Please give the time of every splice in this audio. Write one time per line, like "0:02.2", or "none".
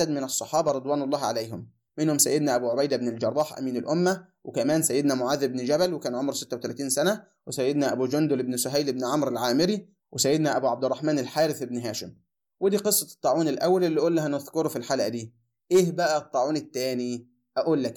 none